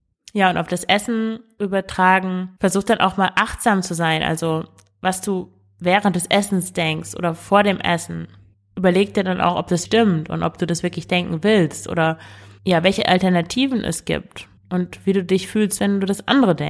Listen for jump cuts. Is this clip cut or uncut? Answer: cut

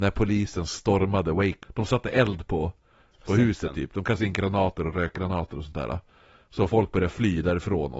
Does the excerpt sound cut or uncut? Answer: cut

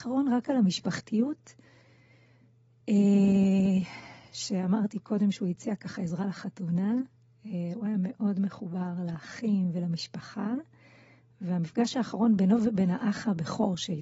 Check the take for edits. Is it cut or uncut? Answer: uncut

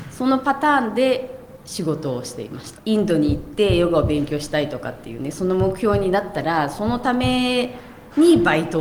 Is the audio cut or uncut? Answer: cut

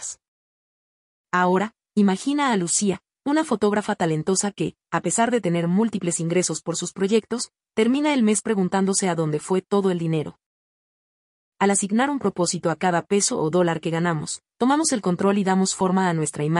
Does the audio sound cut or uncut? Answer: cut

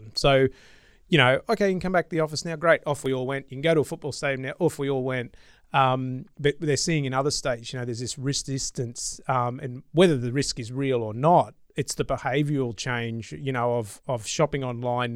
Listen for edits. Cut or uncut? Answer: uncut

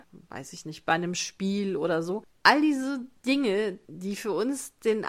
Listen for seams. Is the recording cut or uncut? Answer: cut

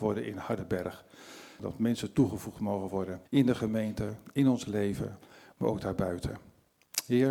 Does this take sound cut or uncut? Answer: cut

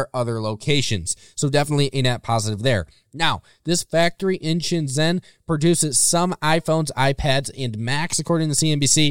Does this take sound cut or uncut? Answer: uncut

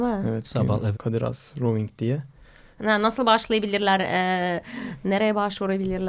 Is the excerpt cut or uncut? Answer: cut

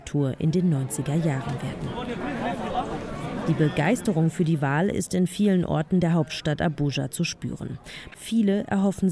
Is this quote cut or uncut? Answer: cut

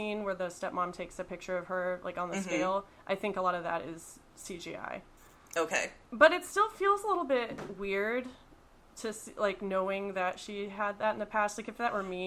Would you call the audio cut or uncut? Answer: uncut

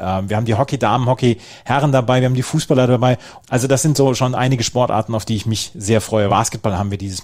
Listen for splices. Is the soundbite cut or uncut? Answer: cut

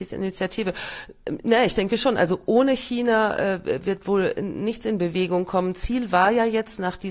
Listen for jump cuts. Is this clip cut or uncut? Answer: uncut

